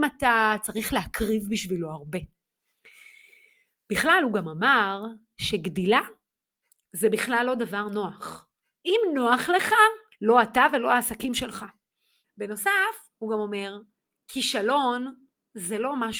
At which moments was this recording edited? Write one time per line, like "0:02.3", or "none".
0:10.1
0:12.2